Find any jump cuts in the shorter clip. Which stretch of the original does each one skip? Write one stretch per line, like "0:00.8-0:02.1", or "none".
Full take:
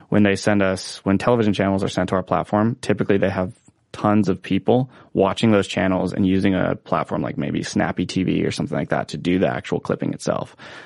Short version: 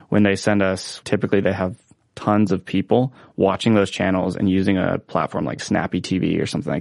0:01.0-0:02.8
0:07.4-0:07.6

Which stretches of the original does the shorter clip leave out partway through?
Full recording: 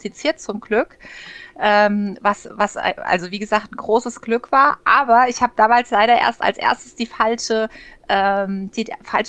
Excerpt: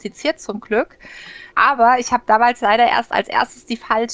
0:01.5-0:04.8

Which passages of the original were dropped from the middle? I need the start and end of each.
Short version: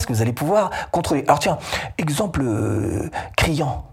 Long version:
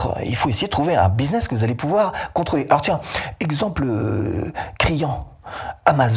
none

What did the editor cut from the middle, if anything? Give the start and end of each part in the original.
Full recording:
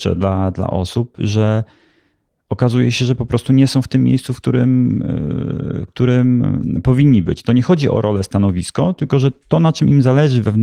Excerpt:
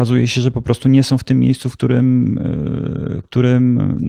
none

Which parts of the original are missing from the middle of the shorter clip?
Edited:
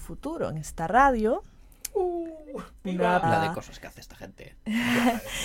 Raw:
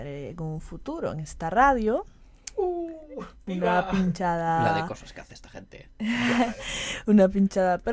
0:03.9-0:04.6

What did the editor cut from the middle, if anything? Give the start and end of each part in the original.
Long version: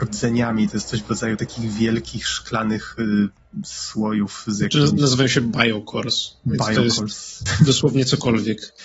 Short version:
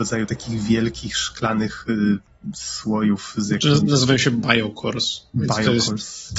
none

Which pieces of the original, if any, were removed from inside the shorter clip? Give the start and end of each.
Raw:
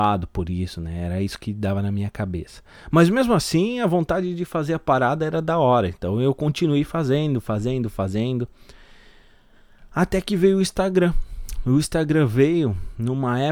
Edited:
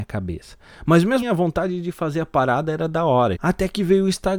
0:03.3-0:03.7
0:05.9-0:09.9

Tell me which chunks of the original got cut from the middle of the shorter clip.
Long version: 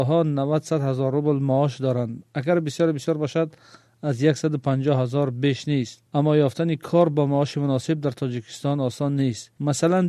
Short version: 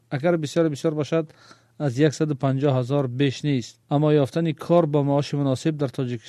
none

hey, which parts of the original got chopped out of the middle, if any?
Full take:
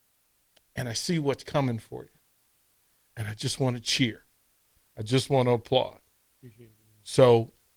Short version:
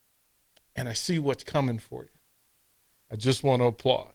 0:03.0-0:04.8

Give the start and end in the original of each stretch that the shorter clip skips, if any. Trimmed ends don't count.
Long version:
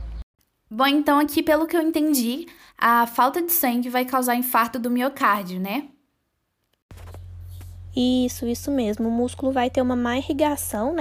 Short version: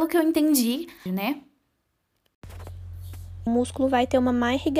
0:02.7-0:05.5
0:07.9-0:09.1

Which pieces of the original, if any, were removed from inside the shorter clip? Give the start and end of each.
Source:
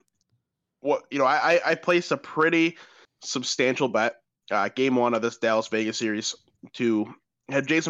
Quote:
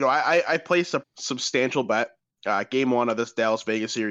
0:02.2-0:03.1

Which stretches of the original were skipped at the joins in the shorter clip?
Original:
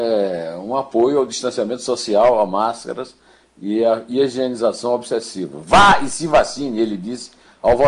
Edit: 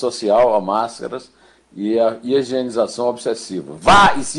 none

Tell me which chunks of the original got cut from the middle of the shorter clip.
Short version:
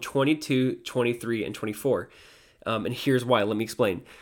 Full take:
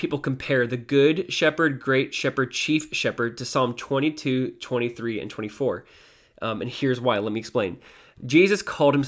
none

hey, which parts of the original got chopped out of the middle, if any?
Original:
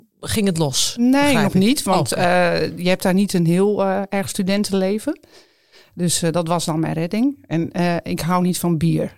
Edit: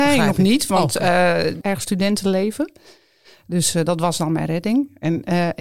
0:02.8-0:04.1

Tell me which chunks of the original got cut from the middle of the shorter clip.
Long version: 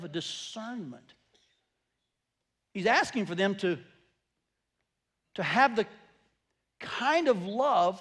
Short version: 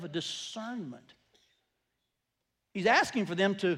none

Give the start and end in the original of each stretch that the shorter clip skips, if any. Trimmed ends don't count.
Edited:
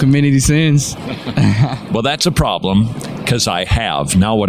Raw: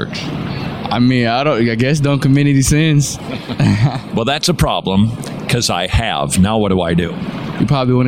none

